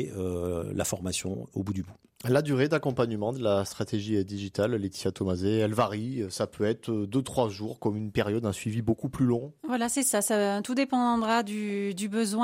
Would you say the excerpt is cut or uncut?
uncut